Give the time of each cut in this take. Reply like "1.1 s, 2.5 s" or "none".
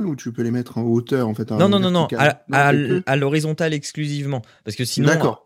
none